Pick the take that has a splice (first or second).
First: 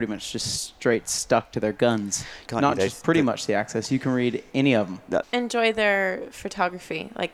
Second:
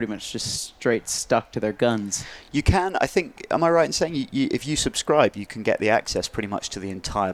first